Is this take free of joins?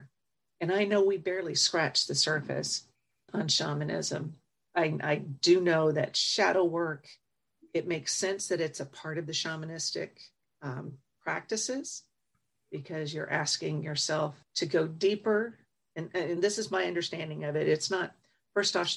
yes; 0 cuts

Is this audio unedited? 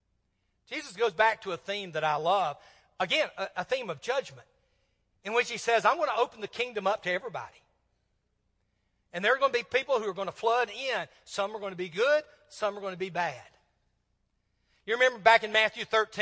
yes; 0 cuts

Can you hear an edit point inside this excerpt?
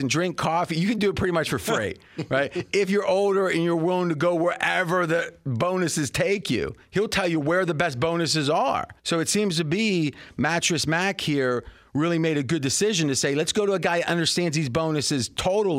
yes; 2 cuts; at 6.8 s, 9.0 s

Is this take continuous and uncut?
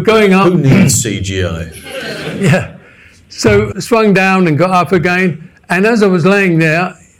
yes; 0 cuts

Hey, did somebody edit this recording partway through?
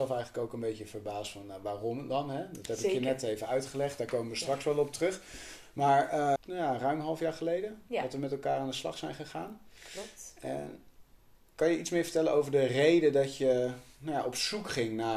yes; 1 cut; at 6.4 s

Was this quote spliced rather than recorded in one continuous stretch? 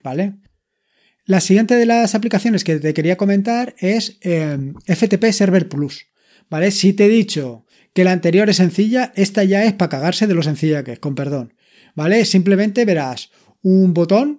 no; 0 cuts

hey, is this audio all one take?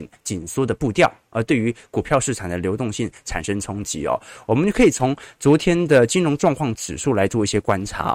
yes; 0 cuts

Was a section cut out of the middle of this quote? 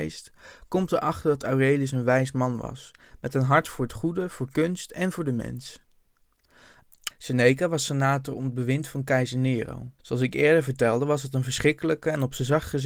yes; 2 cuts; at 7.1 s, 10.0 s

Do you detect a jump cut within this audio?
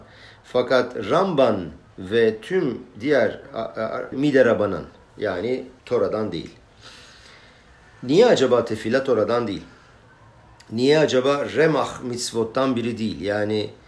yes; 2 cuts; at 4.1 s, 5.8 s

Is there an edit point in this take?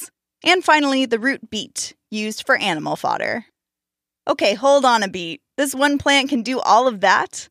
no; 0 cuts

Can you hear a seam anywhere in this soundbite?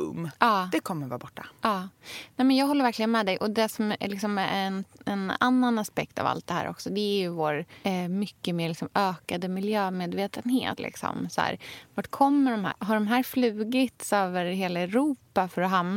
yes; 2 cuts; at 10.8 s, 12.7 s

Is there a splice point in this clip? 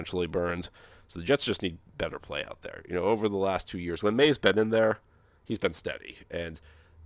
no; 0 cuts

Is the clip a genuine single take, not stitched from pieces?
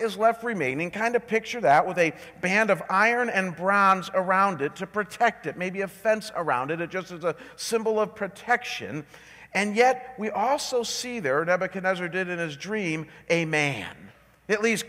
yes; 0 cuts

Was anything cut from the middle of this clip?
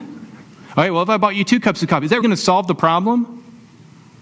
yes; 1 cut; at 2.2 s

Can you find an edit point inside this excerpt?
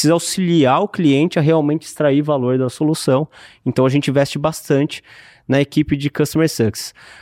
no; 0 cuts

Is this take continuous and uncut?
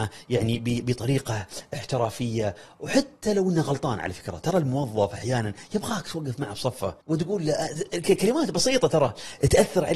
no; 1 cut; at 7.0 s

